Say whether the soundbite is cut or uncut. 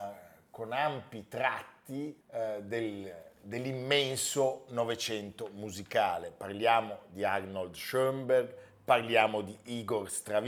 cut